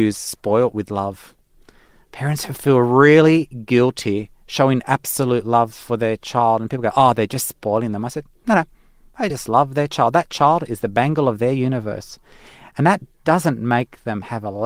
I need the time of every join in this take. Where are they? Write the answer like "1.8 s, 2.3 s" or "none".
none